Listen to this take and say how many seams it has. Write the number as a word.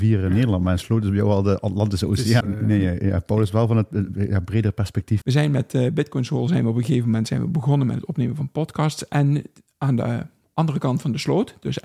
two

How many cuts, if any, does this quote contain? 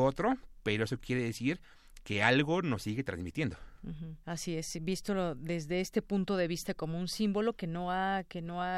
one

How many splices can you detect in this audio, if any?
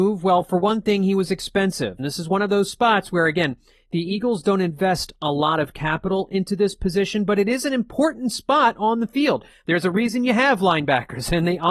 one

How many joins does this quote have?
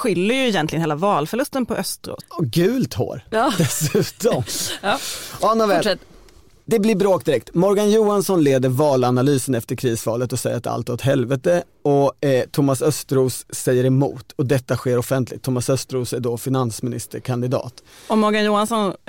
one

